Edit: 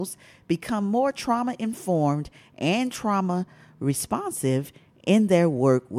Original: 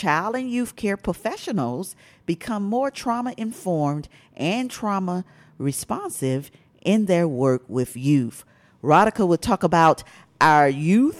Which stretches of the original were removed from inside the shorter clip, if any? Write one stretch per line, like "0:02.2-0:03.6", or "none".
none